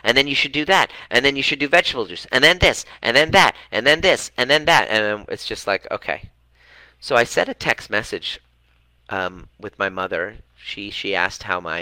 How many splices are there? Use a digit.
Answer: 0